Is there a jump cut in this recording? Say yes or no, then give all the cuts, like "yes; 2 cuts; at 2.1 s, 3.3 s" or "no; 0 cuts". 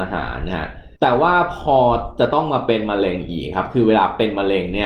yes; 1 cut; at 0.9 s